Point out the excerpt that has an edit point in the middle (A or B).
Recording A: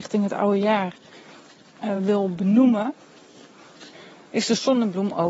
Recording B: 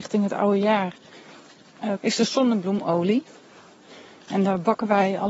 B